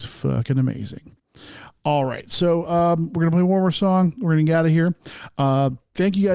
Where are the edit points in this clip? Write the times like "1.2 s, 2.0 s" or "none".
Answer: none